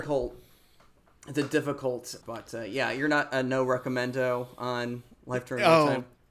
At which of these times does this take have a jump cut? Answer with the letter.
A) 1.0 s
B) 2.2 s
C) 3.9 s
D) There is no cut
B